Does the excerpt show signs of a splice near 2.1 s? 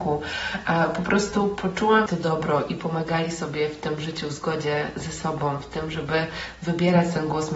yes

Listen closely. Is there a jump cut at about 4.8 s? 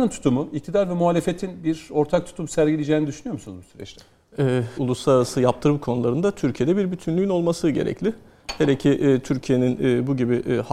yes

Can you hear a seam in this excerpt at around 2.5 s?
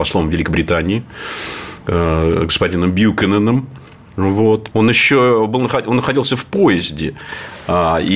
no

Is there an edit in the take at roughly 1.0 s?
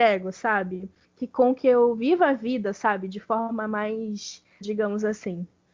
yes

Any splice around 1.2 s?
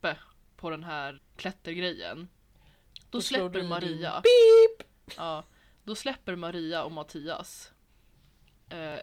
yes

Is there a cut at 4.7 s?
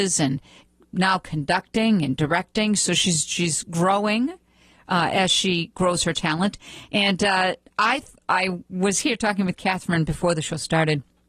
no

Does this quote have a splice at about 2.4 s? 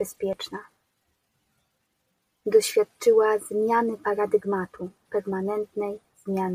yes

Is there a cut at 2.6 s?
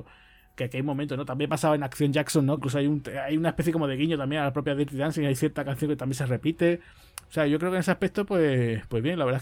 yes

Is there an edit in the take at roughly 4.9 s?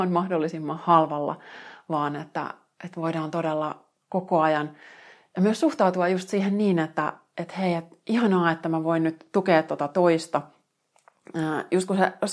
no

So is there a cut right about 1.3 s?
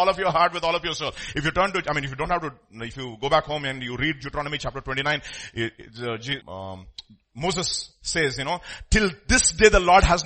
no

